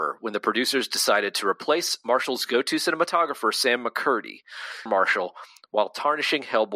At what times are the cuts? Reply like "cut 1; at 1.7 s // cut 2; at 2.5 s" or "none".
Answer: cut 1; at 4.9 s